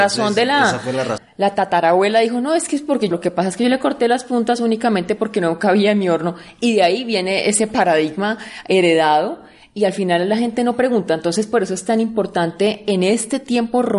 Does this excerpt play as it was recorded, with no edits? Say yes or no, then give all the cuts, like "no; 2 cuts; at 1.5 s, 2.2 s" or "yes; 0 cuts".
no; 2 cuts; at 1.2 s, 3.1 s